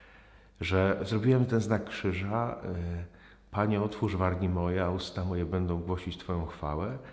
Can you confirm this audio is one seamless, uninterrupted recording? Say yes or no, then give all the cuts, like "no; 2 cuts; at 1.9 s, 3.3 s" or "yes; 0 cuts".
yes; 0 cuts